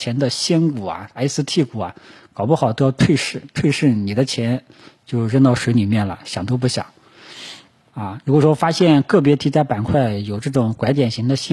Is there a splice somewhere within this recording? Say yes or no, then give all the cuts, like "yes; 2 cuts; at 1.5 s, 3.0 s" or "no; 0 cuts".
yes; 1 cut; at 7.9 s